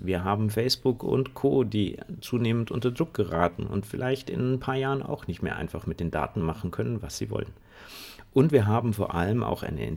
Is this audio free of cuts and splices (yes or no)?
yes